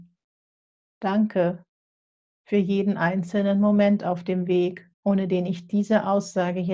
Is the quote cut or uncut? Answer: cut